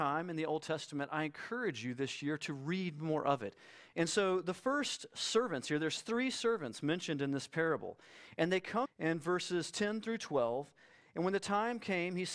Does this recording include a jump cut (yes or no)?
yes